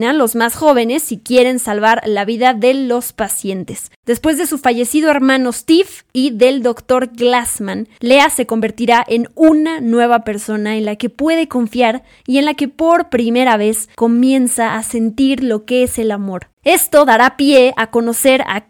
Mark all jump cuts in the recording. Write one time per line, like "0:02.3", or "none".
0:04.0
0:16.5